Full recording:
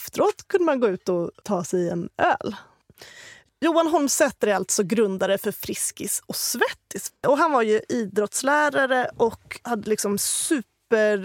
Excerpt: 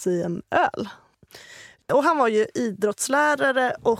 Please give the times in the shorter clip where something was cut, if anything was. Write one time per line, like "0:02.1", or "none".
0:01.8